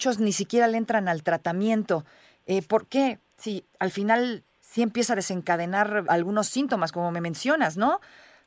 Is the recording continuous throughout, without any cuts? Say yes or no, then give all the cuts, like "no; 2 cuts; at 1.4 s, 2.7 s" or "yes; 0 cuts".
no; 1 cut; at 6.0 s